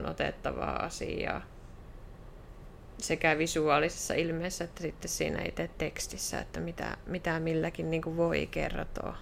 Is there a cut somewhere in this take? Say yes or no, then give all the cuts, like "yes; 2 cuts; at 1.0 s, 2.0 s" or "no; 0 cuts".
no; 0 cuts